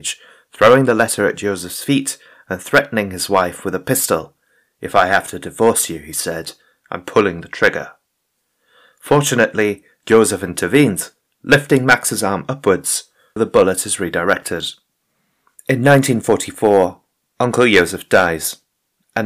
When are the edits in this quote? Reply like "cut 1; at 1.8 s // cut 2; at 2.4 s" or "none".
cut 1; at 13.4 s // cut 2; at 15.6 s

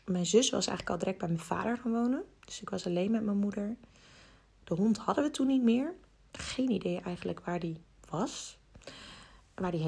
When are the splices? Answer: none

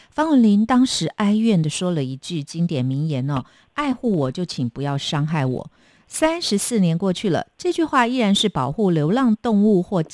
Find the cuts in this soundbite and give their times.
none

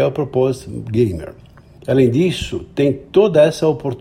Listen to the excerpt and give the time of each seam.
cut 1; at 1.8 s

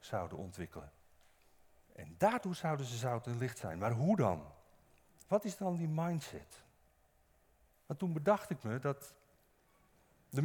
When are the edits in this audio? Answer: cut 1; at 1.8 s // cut 2; at 7.7 s

